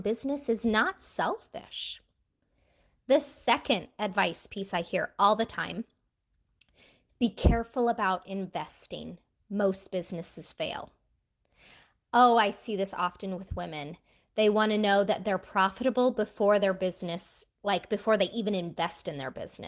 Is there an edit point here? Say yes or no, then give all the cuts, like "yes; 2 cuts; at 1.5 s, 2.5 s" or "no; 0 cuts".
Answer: no; 0 cuts